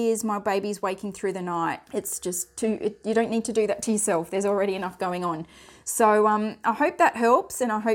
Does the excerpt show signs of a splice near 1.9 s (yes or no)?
yes